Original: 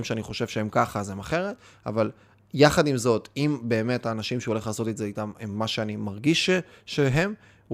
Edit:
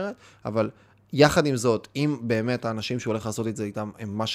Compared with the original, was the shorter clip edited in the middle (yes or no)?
no